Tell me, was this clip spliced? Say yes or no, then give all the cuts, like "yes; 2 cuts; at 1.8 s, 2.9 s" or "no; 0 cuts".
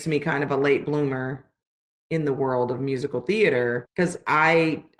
no; 0 cuts